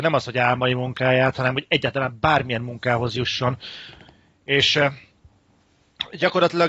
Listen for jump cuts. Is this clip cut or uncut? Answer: uncut